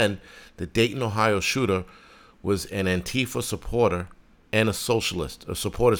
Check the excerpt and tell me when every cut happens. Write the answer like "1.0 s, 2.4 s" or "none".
4.4 s